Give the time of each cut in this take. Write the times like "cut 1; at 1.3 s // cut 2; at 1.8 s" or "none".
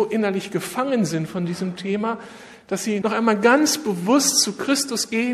cut 1; at 3.0 s